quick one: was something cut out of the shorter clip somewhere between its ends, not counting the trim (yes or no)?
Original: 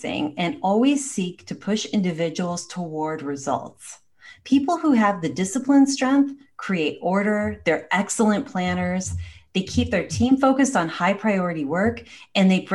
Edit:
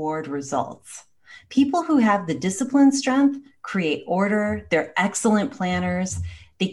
no